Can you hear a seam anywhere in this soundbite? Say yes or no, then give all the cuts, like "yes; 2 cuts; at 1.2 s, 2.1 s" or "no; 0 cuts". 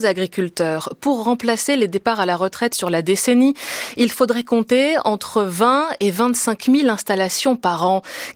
no; 0 cuts